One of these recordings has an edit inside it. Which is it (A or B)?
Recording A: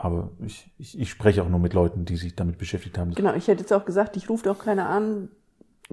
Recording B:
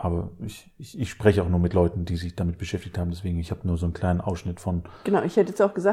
A